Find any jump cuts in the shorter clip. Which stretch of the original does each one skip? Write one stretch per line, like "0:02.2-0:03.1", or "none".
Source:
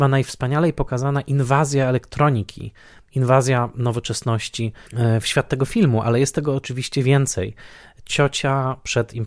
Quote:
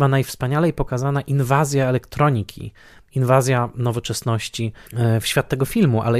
none